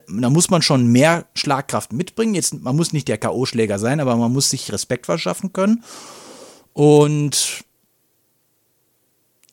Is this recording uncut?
yes; 0 cuts

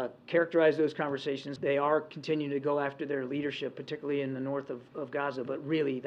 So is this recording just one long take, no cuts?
no; 1 cut; at 1.6 s

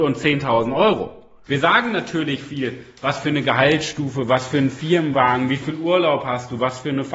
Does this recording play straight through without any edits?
no; 1 cut; at 1.5 s

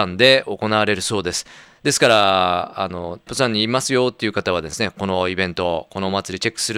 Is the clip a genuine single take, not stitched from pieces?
no; 1 cut; at 3.3 s

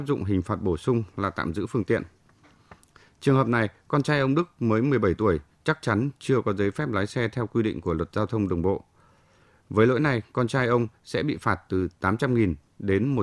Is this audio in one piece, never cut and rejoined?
yes; 0 cuts

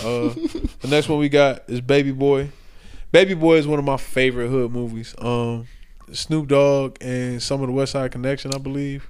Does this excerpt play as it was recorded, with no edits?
yes; 0 cuts

